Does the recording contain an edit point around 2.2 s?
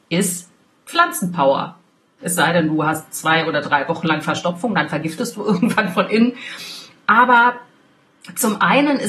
yes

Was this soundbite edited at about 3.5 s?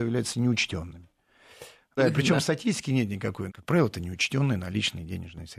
yes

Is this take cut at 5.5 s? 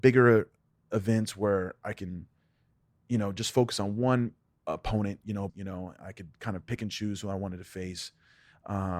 yes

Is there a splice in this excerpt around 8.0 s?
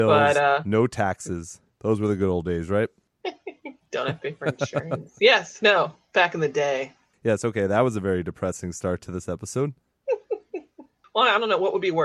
no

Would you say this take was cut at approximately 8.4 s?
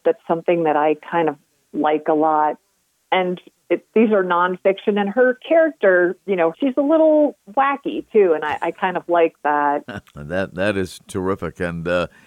no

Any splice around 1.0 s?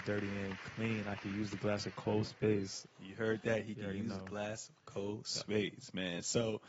no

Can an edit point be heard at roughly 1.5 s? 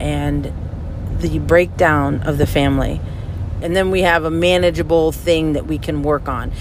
no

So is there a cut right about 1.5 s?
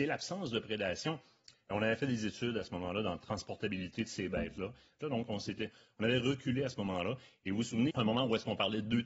yes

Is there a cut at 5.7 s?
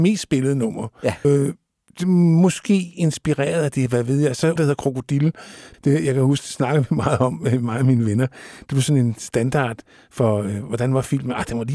yes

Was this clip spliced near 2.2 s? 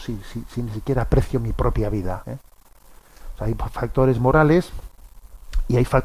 yes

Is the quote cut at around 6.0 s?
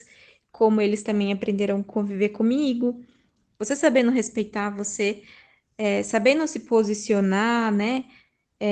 no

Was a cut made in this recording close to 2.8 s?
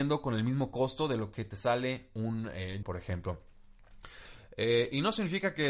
yes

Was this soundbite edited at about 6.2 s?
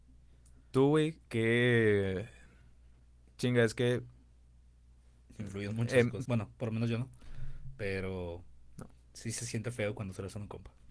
yes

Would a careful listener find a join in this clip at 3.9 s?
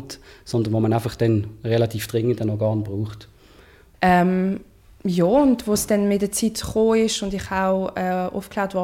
yes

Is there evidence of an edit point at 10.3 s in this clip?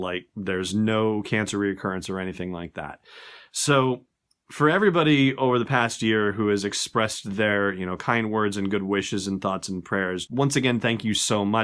yes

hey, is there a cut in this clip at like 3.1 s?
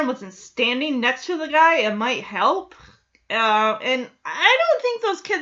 no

